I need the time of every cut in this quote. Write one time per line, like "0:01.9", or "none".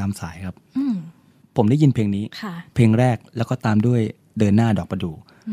0:02.3